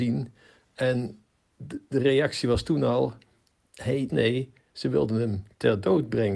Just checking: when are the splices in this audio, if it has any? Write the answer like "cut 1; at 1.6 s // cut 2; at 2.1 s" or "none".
cut 1; at 4.1 s